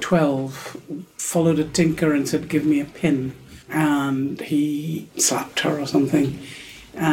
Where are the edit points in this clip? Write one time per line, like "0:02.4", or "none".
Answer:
0:03.6
0:05.1